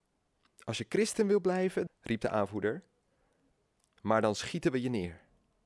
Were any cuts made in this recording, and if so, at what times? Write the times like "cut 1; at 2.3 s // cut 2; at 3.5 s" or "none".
cut 1; at 1.9 s